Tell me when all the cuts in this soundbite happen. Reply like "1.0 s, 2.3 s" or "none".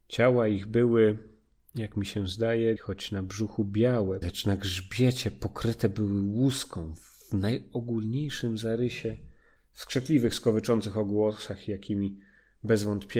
2.8 s, 4.2 s, 9.6 s